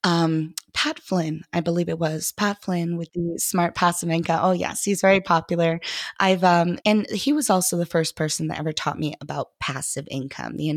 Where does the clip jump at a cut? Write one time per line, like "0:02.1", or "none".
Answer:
0:06.8

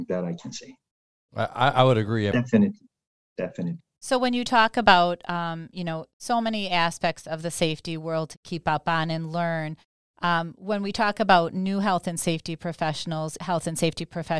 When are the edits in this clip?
0:02.3
0:13.4

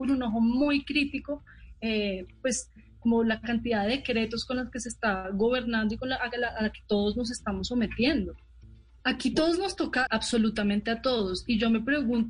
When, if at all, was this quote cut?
0:09.0
0:10.1

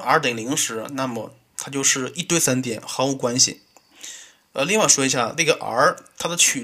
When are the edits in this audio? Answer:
none

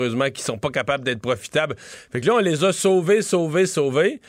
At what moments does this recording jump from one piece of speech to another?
none

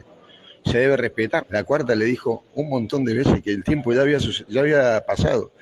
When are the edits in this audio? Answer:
0:01.4

